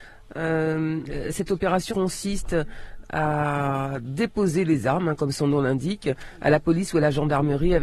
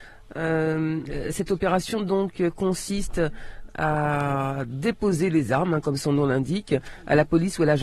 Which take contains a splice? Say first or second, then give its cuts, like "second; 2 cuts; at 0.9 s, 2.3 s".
first; 1 cut; at 1.9 s